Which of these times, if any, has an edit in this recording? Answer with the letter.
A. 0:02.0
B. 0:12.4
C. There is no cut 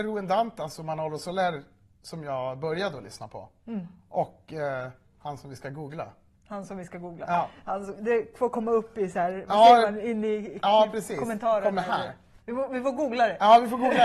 B